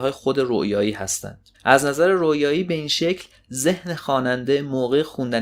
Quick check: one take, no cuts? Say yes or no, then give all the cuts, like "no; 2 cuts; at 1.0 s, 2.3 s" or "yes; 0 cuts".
no; 1 cut; at 1.5 s